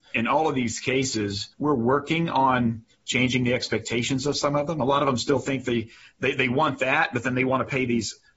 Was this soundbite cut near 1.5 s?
yes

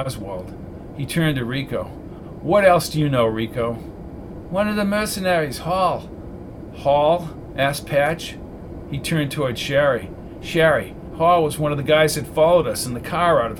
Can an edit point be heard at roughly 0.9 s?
no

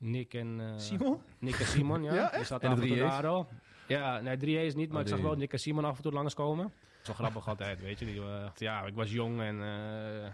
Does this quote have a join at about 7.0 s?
yes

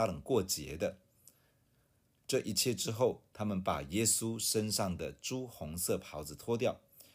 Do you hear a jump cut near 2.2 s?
yes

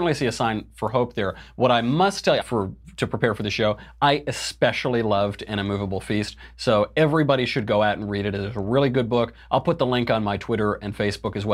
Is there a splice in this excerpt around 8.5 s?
no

